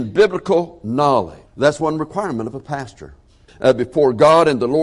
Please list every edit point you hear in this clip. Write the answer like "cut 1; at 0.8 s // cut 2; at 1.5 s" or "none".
cut 1; at 1.5 s // cut 2; at 3.5 s